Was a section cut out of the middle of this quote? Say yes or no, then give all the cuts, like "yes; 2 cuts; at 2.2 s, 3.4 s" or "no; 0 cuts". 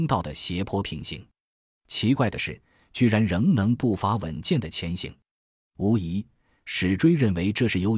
no; 0 cuts